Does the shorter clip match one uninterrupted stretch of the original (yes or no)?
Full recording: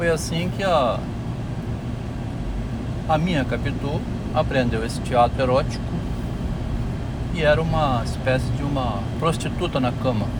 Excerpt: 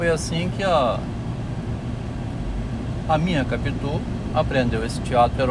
yes